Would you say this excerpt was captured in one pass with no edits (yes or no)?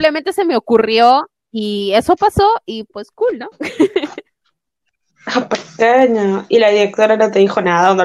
yes